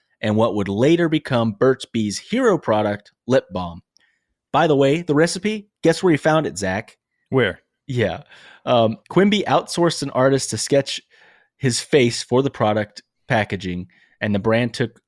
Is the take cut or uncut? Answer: cut